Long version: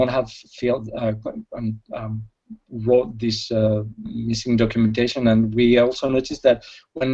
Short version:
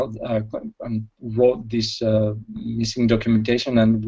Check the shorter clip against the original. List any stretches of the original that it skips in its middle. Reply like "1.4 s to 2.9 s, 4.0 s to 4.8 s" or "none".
1.8 s to 2.6 s